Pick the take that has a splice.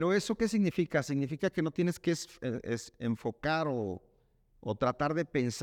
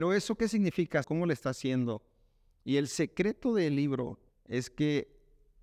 second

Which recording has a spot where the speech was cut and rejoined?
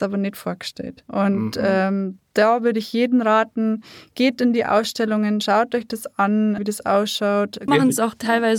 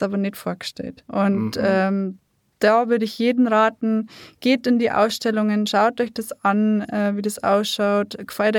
first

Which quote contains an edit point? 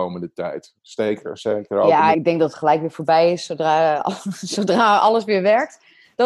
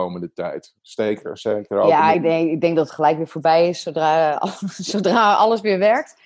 first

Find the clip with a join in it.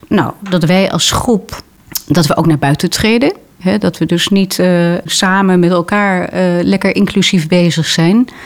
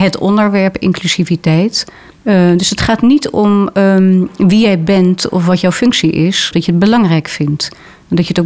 second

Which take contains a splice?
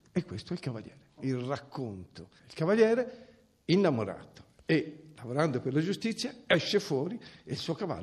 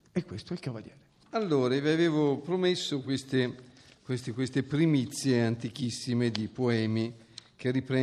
first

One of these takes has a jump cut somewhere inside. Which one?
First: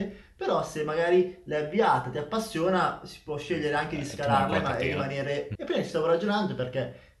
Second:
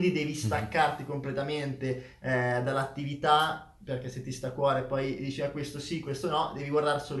first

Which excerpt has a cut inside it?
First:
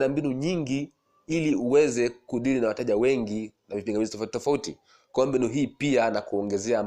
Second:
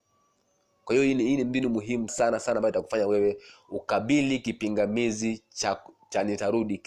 second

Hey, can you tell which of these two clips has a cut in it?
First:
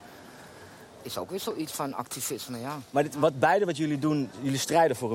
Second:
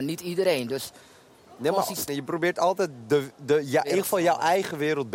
second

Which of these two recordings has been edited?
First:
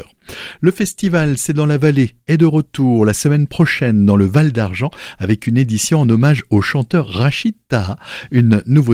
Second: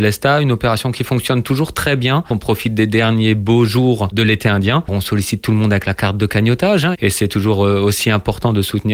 second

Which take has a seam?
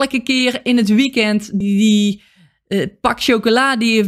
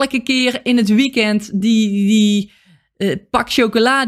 first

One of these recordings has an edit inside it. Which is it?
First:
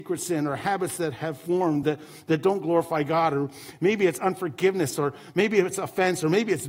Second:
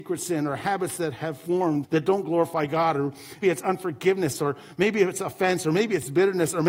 second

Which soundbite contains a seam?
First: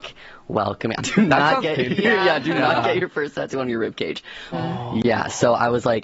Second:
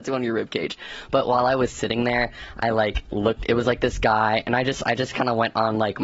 first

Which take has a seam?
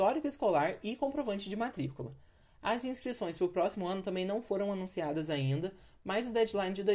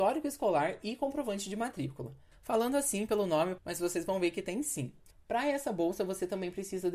second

